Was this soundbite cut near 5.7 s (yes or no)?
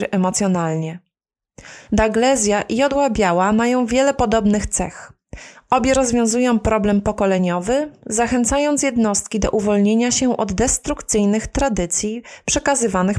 no